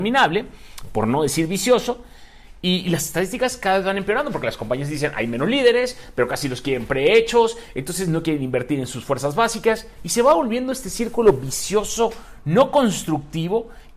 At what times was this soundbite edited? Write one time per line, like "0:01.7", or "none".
none